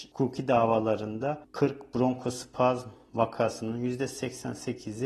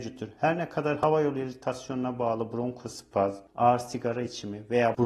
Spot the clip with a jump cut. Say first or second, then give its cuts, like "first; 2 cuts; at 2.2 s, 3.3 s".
second; 1 cut; at 3.5 s